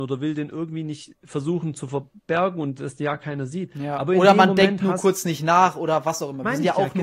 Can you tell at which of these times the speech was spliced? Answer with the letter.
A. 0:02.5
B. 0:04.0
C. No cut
C